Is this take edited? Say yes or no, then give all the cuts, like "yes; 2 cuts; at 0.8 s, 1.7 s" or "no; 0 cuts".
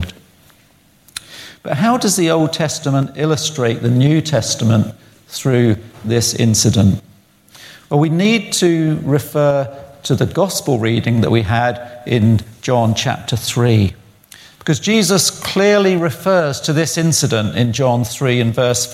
no; 0 cuts